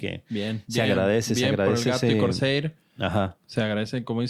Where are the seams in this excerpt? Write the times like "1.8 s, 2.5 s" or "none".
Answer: none